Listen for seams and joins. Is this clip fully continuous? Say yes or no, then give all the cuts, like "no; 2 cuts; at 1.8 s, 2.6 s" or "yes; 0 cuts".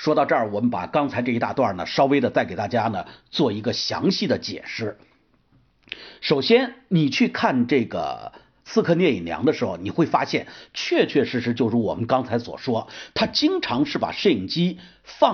yes; 0 cuts